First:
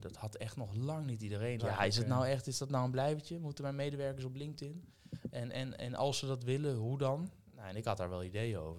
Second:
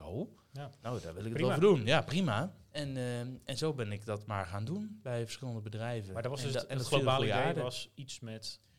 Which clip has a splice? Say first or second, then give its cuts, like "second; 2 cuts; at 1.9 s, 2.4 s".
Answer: first; 1 cut; at 1.6 s